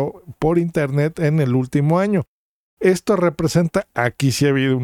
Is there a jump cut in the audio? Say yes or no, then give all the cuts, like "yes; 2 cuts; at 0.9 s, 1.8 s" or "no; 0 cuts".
no; 0 cuts